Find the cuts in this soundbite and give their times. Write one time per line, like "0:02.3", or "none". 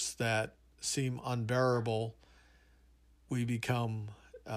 none